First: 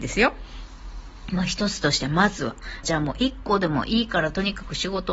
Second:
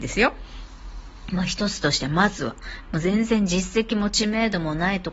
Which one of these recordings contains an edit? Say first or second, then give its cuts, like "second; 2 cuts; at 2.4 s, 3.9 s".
first; 1 cut; at 2.8 s